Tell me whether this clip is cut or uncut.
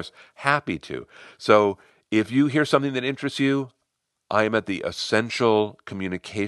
uncut